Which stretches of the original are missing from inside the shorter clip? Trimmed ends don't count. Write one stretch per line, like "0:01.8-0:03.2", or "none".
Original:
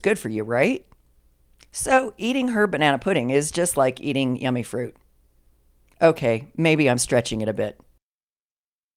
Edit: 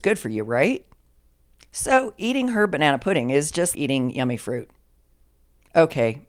0:03.7-0:04.0

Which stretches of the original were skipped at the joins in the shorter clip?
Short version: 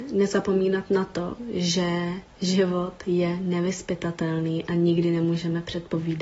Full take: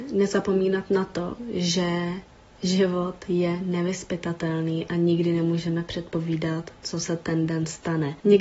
0:02.3-0:02.5

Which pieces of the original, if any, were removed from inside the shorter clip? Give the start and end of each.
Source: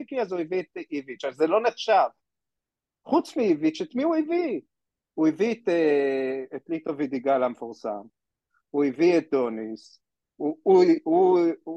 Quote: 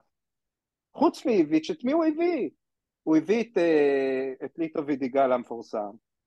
none

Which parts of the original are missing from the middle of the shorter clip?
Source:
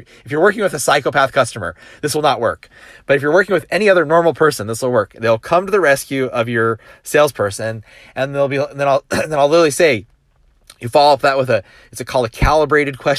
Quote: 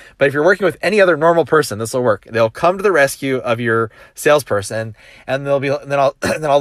none

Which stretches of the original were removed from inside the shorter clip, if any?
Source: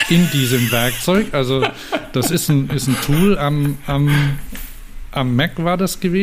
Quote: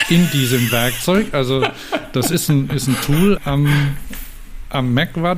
0:03.4-0:03.8

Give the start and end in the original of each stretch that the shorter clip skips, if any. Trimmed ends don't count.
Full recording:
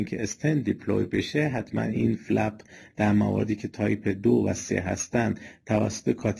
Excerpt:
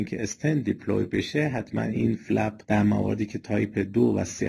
0:02.6-0:02.9

